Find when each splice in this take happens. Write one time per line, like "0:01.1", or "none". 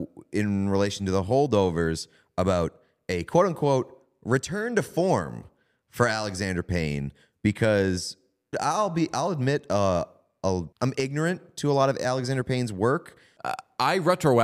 0:08.5
0:10.7
0:13.4